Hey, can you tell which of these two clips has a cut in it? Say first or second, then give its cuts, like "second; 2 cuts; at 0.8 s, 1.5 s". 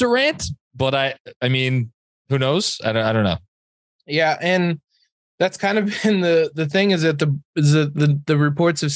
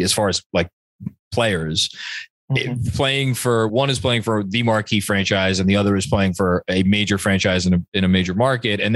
second; 1 cut; at 3.7 s